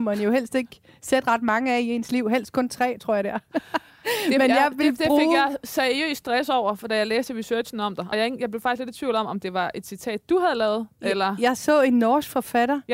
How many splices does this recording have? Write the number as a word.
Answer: zero